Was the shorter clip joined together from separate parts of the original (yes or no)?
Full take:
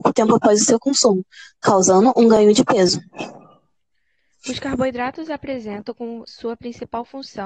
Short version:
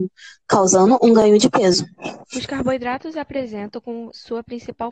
yes